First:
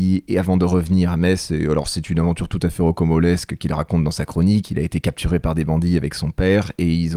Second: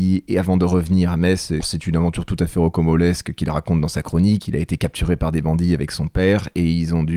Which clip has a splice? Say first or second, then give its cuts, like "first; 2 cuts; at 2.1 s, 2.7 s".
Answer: second; 1 cut; at 1.6 s